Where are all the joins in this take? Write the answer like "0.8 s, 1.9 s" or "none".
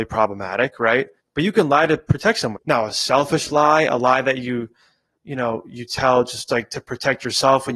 1.2 s, 2.6 s